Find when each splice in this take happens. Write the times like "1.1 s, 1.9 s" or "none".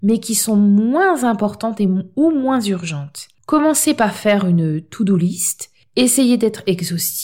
3.3 s